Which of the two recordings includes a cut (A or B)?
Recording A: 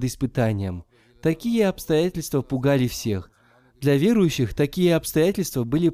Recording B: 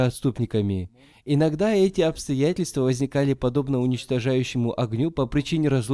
B